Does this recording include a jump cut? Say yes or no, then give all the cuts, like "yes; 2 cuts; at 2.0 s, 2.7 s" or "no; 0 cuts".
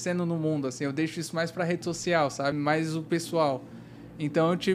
yes; 1 cut; at 2.5 s